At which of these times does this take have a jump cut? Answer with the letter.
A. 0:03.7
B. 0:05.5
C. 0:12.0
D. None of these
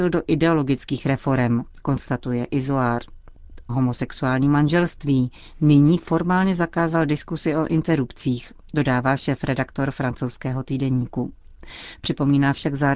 A